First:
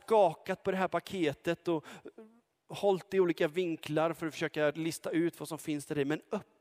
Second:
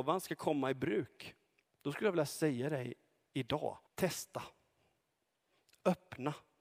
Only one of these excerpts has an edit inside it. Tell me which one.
second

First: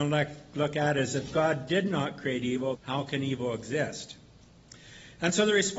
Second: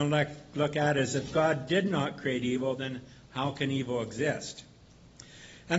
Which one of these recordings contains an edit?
first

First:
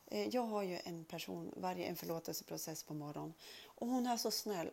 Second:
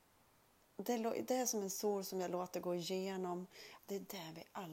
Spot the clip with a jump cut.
second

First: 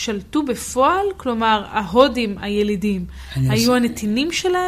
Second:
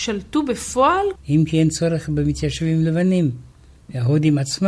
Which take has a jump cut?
second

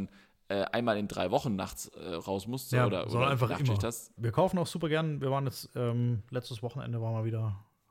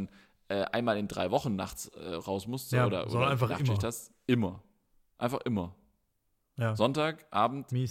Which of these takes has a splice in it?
first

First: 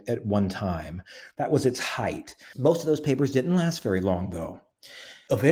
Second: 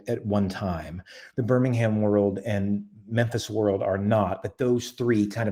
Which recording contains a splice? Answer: second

